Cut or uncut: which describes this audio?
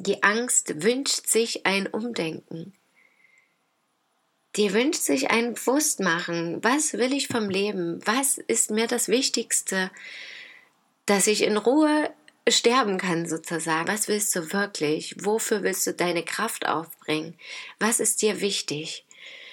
cut